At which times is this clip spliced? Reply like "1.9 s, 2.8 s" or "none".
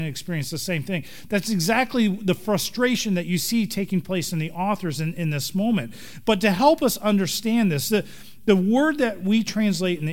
none